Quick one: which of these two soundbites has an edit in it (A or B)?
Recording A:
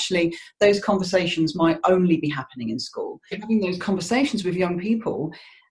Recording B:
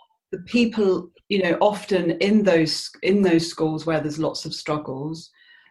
A